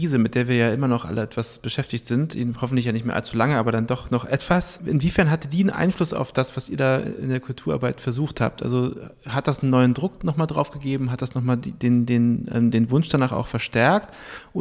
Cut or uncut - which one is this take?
uncut